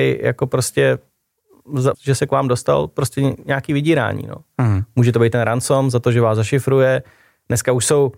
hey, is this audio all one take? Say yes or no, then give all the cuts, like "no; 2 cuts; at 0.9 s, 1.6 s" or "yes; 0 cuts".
no; 1 cut; at 1.9 s